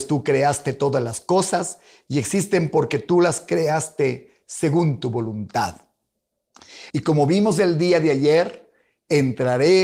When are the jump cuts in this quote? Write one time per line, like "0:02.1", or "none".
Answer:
0:06.9